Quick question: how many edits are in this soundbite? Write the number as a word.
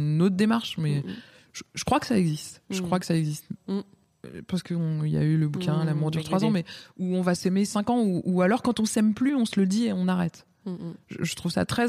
one